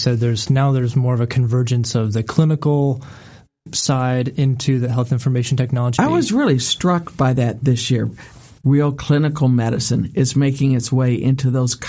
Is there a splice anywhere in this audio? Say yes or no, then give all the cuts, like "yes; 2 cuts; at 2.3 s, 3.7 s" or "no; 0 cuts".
yes; 2 cuts; at 6.0 s, 8.6 s